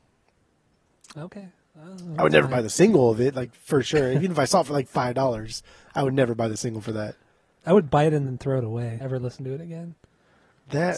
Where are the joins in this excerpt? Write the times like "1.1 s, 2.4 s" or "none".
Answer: 9.0 s